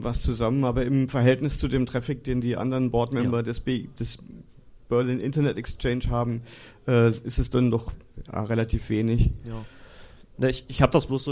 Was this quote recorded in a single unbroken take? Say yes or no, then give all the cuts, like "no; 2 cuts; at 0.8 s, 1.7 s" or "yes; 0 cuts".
yes; 0 cuts